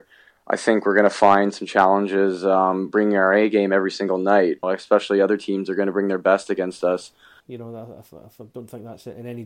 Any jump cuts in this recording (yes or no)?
yes